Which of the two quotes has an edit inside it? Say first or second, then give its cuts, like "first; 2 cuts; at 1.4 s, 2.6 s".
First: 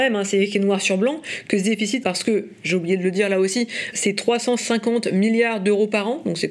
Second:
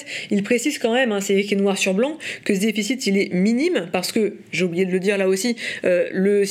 first; 2 cuts; at 2.0 s, 3.9 s